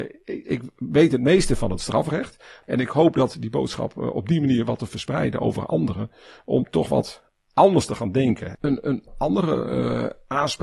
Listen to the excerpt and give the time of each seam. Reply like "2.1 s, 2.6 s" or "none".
2.6 s, 8.5 s

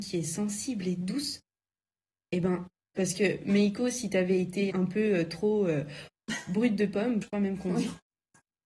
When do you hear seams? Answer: 4.7 s, 7.2 s

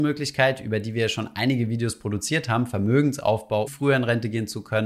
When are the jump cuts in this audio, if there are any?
3.7 s

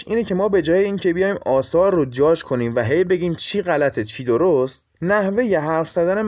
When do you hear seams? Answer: 4.9 s

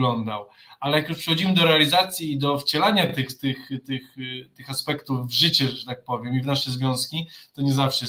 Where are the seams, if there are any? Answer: none

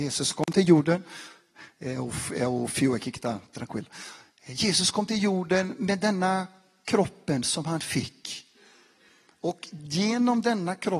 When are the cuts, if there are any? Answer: none

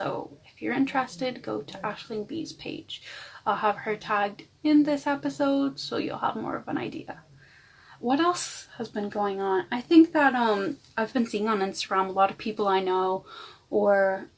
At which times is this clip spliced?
none

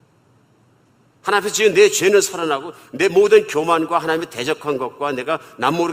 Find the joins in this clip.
1.2 s

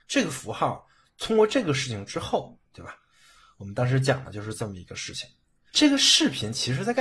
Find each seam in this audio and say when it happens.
2.7 s, 5.7 s

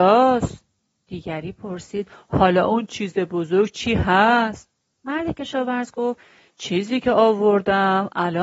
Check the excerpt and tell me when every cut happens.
none

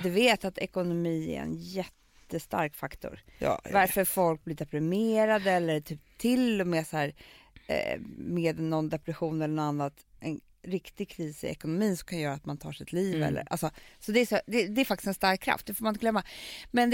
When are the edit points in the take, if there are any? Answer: none

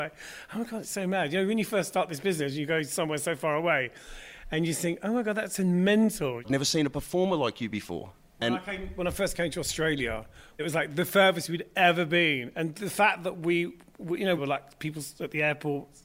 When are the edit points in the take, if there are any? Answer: 6.4 s, 14.4 s

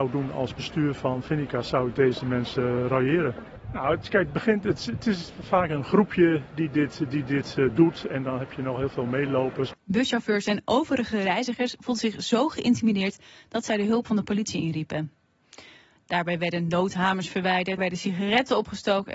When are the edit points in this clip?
9.7 s, 16.0 s, 17.8 s

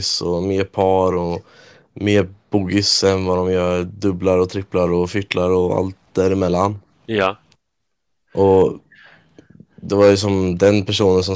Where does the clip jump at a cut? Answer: none

